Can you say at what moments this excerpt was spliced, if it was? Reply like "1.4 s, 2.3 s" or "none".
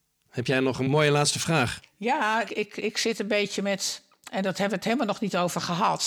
2.4 s